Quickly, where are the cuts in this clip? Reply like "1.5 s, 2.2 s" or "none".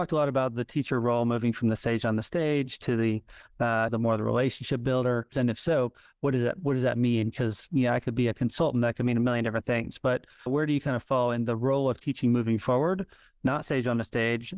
3.9 s, 5.3 s, 10.5 s